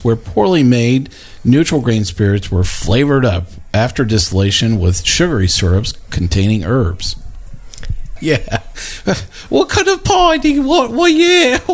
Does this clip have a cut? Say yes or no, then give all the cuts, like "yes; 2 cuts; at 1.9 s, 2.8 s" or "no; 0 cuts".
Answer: yes; 1 cut; at 8.2 s